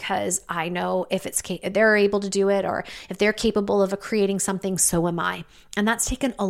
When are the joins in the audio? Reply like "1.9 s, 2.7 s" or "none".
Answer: none